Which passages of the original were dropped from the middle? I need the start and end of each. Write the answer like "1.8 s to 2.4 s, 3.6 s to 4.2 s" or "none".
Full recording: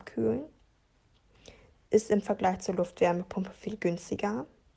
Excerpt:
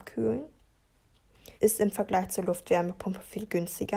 1.6 s to 1.9 s